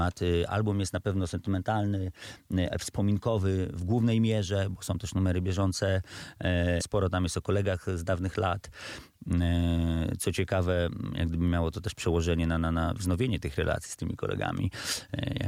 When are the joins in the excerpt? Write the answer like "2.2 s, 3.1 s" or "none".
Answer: 6.8 s